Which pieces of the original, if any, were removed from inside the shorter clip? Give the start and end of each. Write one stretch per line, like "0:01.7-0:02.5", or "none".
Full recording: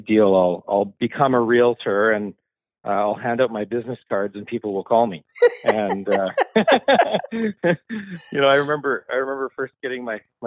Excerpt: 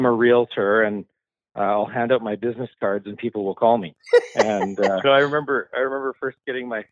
0:06.3-0:08.4